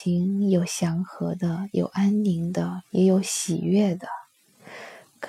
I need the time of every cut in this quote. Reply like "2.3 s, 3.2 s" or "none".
2.8 s